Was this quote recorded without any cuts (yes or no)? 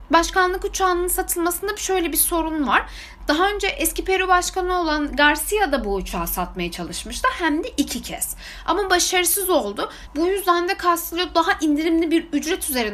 no